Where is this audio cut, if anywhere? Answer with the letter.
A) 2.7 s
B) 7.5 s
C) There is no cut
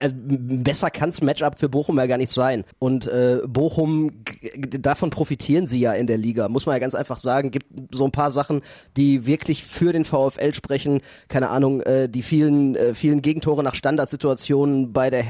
A